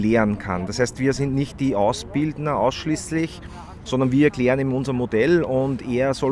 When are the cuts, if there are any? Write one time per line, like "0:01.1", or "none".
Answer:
none